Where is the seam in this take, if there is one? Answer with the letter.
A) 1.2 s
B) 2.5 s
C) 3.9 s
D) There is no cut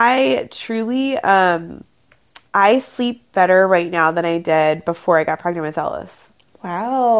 B